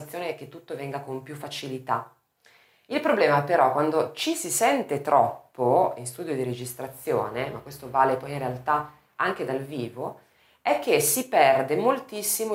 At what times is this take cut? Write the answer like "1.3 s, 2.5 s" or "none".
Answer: none